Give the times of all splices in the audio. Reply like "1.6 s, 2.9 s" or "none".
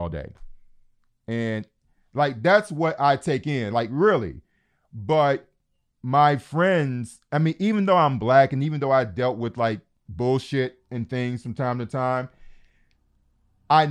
none